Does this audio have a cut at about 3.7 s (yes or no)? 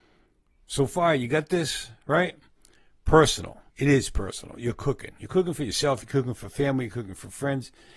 yes